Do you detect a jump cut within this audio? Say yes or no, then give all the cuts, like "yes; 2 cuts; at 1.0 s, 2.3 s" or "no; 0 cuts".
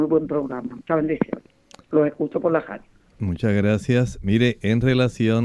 no; 0 cuts